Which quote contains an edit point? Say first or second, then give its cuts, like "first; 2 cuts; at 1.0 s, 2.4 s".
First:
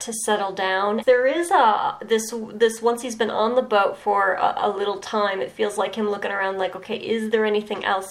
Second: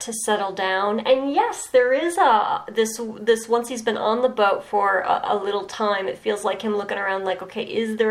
first; 1 cut; at 1.0 s